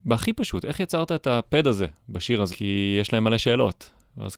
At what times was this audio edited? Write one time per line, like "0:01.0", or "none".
0:02.5